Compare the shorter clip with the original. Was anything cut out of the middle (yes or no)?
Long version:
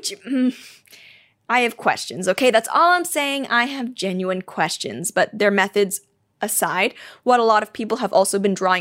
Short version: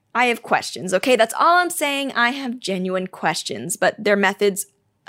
no